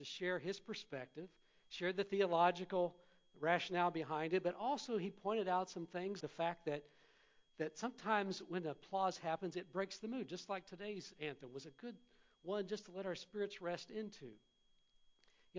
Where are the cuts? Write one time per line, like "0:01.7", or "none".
0:06.2